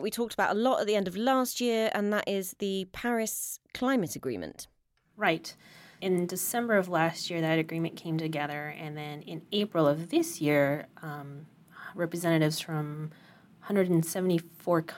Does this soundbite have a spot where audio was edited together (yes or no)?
no